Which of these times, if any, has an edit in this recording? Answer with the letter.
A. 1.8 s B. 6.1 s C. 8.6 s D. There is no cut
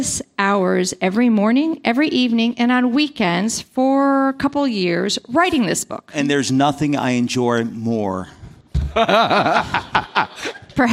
D